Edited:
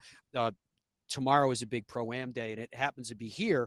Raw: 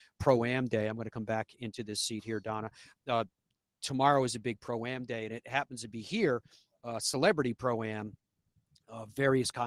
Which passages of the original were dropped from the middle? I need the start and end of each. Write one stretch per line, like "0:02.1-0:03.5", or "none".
none